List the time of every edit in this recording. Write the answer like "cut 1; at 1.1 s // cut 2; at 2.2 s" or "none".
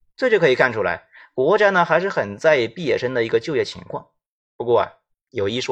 none